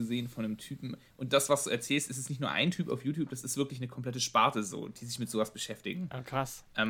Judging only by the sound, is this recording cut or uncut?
uncut